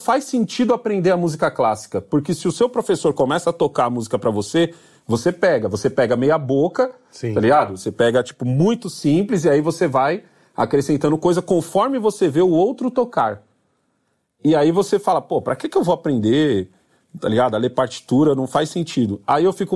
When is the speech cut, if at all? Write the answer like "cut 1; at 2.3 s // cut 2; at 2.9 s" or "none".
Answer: none